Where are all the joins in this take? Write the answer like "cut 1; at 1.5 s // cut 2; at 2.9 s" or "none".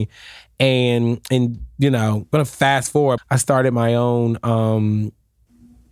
cut 1; at 3.2 s